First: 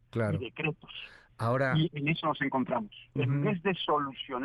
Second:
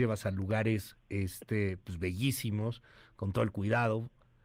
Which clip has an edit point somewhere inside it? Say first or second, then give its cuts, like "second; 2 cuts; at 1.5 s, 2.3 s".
first; 1 cut; at 3.2 s